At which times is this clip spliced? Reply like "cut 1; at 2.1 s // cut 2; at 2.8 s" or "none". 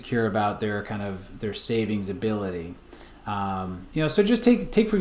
none

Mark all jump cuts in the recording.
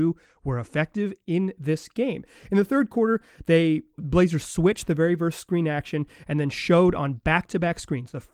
cut 1; at 4.0 s

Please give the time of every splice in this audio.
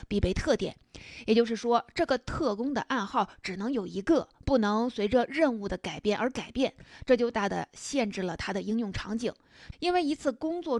cut 1; at 7.3 s // cut 2; at 9.7 s

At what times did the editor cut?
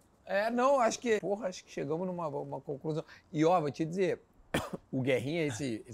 cut 1; at 1.2 s

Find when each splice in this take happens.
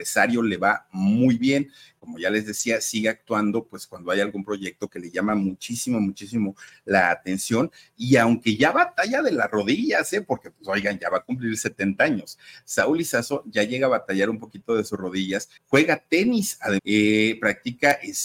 cut 1; at 15.6 s // cut 2; at 16.8 s

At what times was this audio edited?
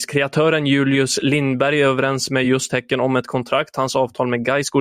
none

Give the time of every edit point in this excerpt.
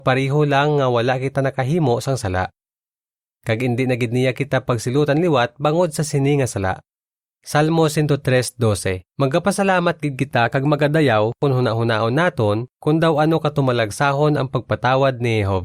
cut 1; at 3.4 s // cut 2; at 7.3 s // cut 3; at 9.1 s

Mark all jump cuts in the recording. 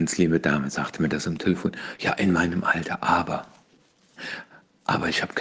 none

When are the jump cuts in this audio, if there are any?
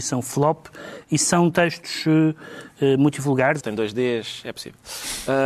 cut 1; at 3.6 s

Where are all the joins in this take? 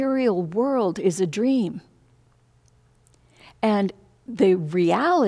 none

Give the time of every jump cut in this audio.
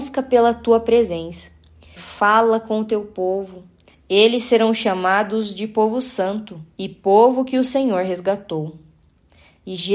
cut 1; at 2.0 s // cut 2; at 3.9 s // cut 3; at 6.7 s

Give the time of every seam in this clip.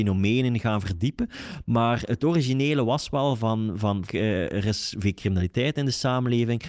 cut 1; at 4.1 s

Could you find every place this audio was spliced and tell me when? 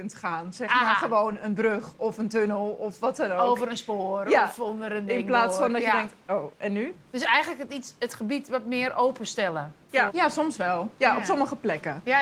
cut 1; at 8.0 s // cut 2; at 10.1 s

